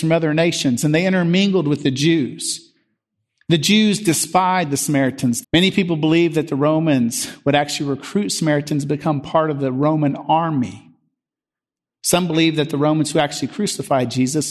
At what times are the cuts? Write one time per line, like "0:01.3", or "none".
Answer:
0:05.4